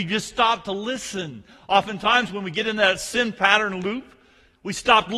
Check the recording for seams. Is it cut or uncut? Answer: uncut